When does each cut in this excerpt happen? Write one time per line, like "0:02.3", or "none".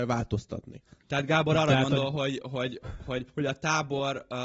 none